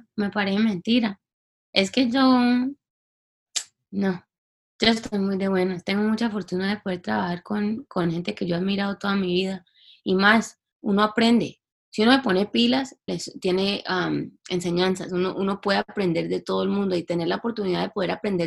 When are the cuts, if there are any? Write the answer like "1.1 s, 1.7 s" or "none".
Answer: 13.1 s